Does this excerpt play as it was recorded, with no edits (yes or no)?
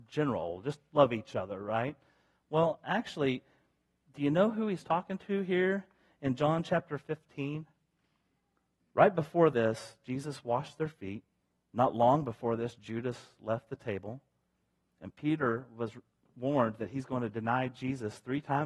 no